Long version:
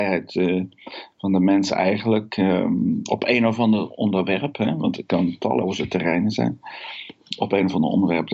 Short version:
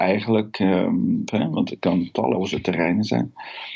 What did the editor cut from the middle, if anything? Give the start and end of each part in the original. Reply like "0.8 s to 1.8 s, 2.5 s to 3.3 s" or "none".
3.0 s to 4.5 s